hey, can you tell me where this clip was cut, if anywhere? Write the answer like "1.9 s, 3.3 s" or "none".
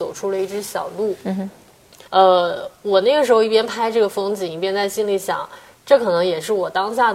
2.1 s